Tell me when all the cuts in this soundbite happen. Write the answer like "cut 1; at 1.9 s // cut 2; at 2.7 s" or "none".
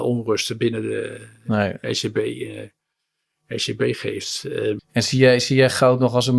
cut 1; at 4.8 s